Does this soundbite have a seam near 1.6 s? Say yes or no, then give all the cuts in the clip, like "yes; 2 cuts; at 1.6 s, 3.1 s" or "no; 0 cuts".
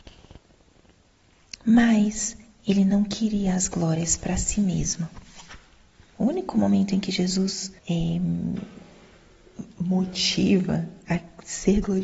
yes; 2 cuts; at 1.6 s, 7.8 s